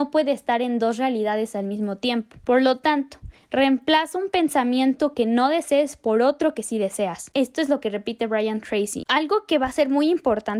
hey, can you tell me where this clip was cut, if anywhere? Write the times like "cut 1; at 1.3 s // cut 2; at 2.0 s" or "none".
cut 1; at 7.3 s // cut 2; at 9.0 s